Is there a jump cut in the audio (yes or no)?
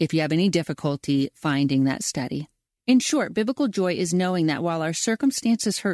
no